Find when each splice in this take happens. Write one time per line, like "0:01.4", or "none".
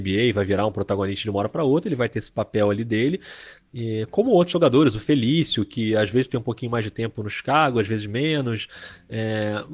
none